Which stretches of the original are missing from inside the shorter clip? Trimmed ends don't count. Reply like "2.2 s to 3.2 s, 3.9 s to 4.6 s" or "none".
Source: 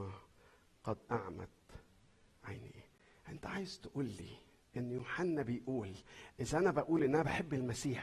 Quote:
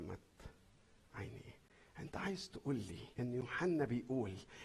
4.4 s to 4.7 s